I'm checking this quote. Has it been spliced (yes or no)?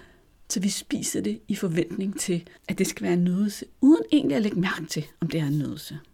yes